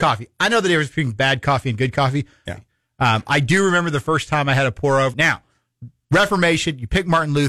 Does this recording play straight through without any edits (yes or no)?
no